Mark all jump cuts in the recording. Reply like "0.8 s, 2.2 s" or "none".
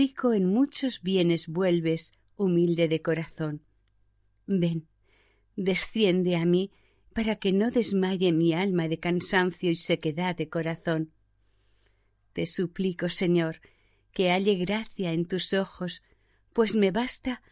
7.1 s